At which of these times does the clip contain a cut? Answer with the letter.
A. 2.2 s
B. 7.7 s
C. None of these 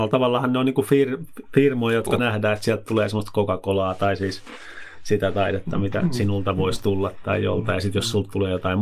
A